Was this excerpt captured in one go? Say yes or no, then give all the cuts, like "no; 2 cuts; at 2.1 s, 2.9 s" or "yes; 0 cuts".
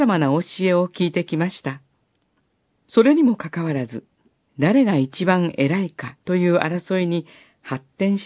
no; 3 cuts; at 2.8 s, 4.4 s, 6.2 s